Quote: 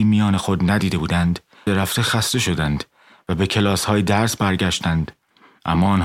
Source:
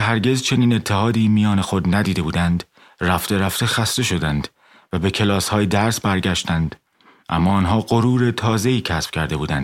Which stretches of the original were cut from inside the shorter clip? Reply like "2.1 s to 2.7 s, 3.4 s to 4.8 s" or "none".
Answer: 2.9 s to 3.3 s